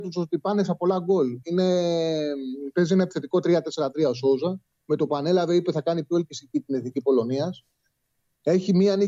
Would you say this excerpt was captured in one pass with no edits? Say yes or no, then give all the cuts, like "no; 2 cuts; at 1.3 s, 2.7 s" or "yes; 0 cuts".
yes; 0 cuts